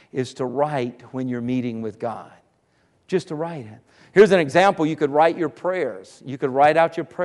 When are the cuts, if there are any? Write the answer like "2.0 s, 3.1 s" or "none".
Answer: none